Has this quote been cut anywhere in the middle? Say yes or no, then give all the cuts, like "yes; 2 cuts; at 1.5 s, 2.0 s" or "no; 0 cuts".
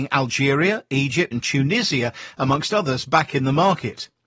yes; 1 cut; at 1.3 s